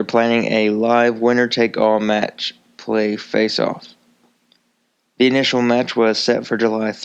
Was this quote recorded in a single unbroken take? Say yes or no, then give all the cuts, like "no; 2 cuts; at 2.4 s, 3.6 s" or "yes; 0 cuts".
yes; 0 cuts